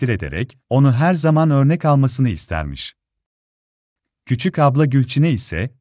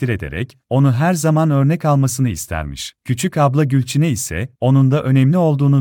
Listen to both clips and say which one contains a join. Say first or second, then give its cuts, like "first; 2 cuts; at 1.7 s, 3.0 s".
second; 2 cuts; at 3.0 s, 4.6 s